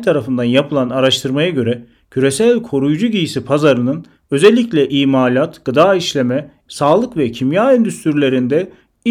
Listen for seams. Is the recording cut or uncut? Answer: cut